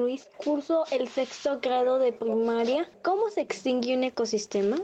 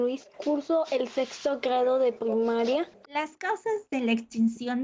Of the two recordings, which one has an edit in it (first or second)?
second